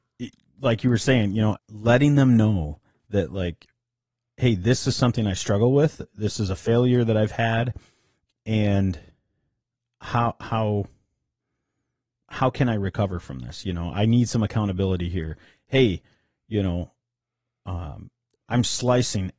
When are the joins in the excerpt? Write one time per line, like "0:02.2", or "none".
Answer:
0:01.6
0:18.3